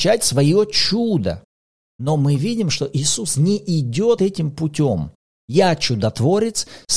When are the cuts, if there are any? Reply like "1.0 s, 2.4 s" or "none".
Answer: 4.2 s